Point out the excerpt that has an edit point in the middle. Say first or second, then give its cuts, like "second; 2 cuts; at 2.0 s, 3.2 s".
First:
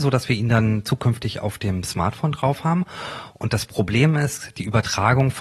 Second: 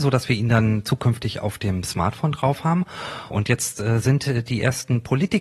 second; 1 cut; at 3.3 s